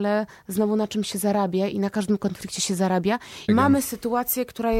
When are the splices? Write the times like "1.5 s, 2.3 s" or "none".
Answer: 3.5 s